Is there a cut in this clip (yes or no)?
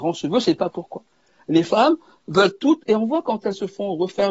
no